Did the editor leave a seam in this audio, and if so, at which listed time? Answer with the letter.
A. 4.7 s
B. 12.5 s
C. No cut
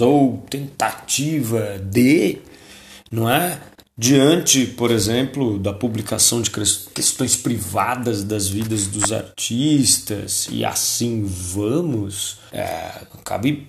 B